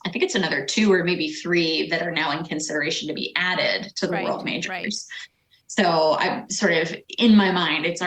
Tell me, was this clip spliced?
no; 0 cuts

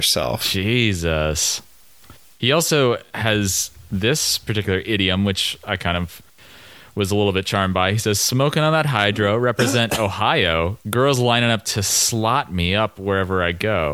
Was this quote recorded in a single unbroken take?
yes; 0 cuts

